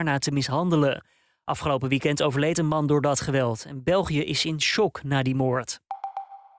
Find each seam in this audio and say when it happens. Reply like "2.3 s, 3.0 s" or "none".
none